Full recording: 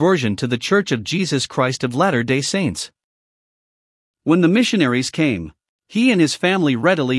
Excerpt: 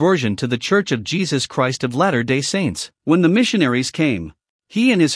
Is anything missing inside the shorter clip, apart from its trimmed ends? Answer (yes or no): yes